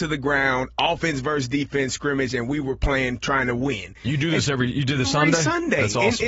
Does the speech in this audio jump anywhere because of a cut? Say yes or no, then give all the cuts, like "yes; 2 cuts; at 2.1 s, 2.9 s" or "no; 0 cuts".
yes; 1 cut; at 5.0 s